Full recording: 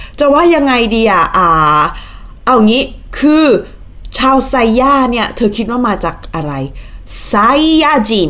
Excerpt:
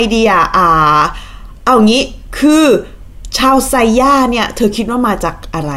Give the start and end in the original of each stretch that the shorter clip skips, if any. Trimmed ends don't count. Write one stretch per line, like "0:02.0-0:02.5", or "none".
none